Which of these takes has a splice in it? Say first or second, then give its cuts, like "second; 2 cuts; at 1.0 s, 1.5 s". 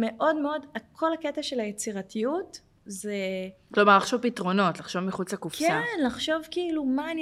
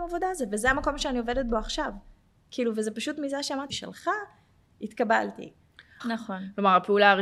second; 2 cuts; at 3.7 s, 6.0 s